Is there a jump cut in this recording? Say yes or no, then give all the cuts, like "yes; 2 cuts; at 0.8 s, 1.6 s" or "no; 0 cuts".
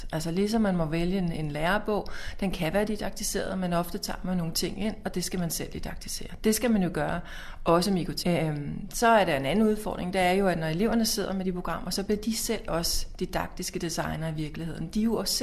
yes; 1 cut; at 8.2 s